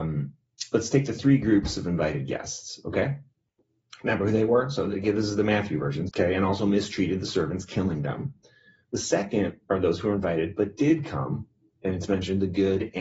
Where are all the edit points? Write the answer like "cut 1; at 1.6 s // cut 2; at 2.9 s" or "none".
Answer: cut 1; at 6.1 s